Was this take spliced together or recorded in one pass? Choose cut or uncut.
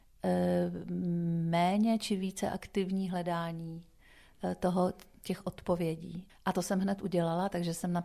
cut